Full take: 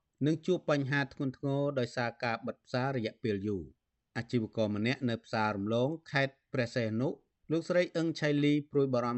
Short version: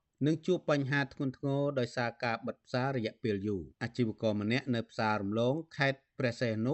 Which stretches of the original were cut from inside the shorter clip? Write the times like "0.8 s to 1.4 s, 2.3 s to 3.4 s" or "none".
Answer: 3.7 s to 4.1 s

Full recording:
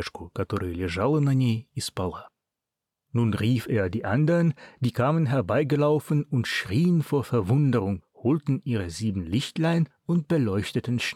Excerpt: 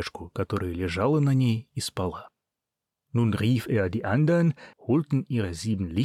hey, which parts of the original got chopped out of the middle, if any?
4.7 s to 8.1 s

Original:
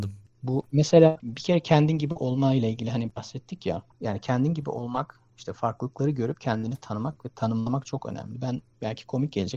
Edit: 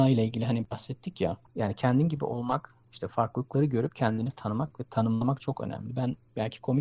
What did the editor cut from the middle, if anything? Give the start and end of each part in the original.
none

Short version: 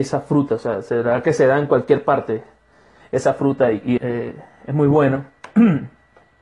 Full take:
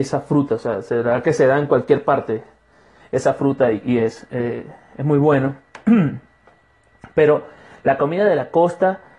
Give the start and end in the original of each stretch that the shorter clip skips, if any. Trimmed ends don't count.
4.0 s to 4.3 s

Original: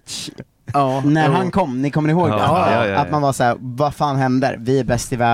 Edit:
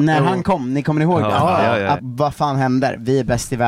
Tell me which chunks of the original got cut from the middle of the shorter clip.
3.1 s to 3.6 s

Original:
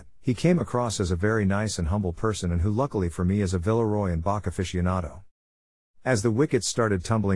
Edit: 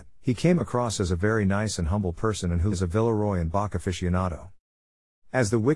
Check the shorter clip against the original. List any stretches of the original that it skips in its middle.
2.7 s to 3.4 s

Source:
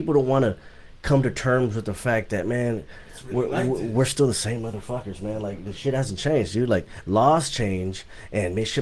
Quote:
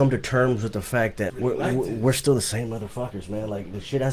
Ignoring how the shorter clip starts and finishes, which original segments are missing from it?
2.4 s to 3.2 s

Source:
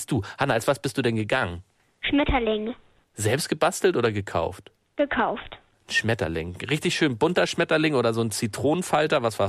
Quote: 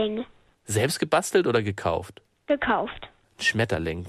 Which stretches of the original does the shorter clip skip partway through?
none

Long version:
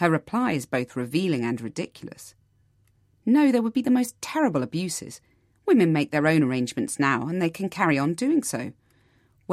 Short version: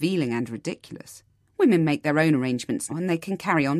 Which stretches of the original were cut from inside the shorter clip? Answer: 2.6 s to 5.5 s, 7.0 s to 7.2 s

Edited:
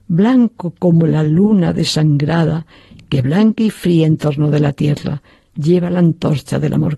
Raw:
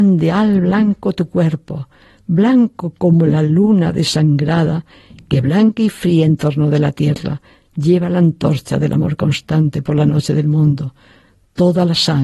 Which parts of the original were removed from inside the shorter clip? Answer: none

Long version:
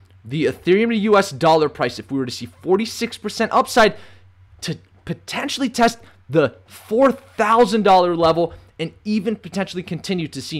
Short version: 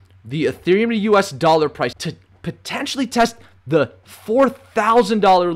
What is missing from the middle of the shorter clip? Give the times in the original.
1.9 s to 4.6 s

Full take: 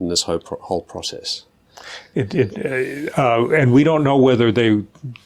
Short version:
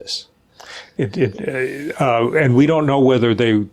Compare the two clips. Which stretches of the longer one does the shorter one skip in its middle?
none

